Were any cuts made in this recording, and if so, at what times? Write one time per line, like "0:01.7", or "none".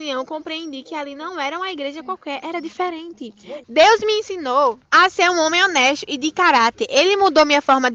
0:03.6
0:04.8

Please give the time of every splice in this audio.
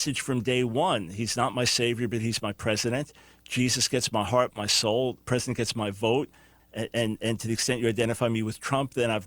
0:04.5
0:06.6

